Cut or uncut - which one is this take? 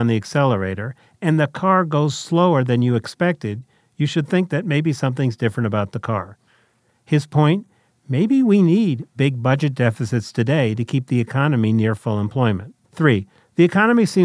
cut